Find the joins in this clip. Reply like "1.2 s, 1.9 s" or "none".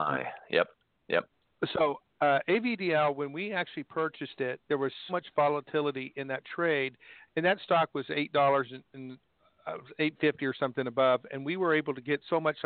5.1 s, 7.3 s